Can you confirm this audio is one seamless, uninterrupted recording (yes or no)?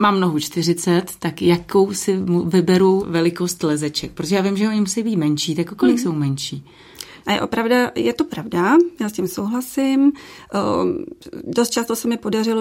no